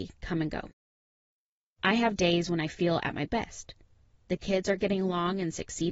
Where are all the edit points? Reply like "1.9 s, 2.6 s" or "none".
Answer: none